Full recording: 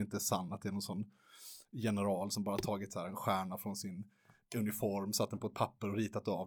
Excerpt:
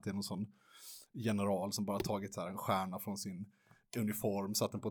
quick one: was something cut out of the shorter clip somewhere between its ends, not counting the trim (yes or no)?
no